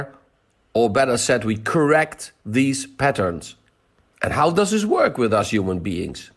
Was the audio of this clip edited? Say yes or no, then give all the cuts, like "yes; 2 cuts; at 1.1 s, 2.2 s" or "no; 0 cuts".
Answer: yes; 1 cut; at 4.1 s